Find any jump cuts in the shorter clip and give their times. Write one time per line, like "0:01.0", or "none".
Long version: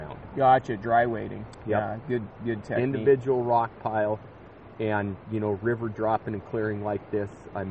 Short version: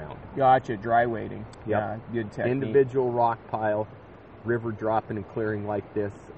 0:02.0
0:04.4